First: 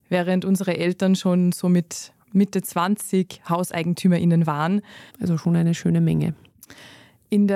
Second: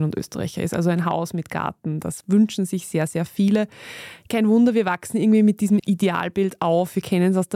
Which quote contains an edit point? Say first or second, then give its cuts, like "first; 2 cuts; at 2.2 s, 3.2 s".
first; 1 cut; at 5.1 s